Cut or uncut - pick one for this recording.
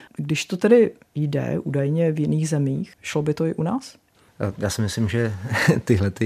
uncut